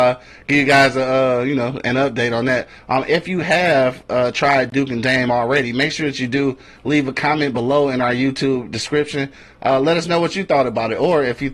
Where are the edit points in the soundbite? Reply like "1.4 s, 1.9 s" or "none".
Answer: none